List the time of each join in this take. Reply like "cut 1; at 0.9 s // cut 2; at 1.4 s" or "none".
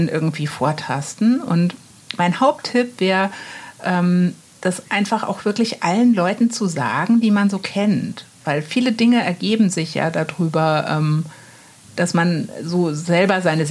none